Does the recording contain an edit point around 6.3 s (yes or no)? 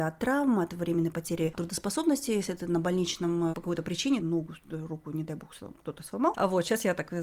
yes